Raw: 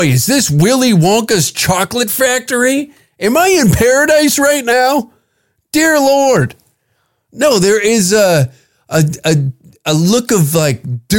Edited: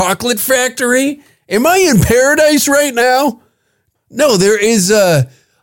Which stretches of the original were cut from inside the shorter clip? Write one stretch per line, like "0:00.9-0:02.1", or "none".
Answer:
0:05.7-0:07.2